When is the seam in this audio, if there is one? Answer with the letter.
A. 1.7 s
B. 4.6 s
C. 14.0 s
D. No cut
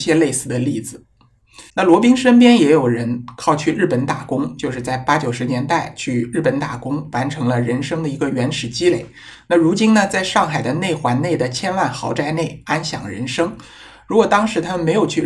A